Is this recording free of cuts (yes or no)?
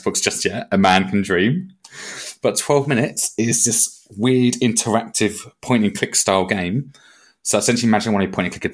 yes